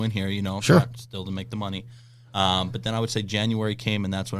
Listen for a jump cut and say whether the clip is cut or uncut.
uncut